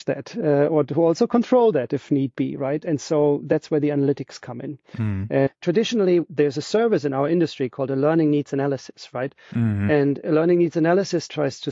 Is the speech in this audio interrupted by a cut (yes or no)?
yes